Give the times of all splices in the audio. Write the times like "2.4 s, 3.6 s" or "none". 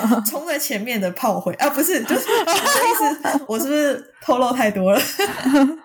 3.5 s